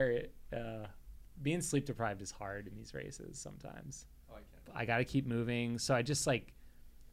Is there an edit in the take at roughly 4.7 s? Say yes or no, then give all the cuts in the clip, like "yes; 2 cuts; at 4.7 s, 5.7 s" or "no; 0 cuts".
yes; 1 cut; at 4.7 s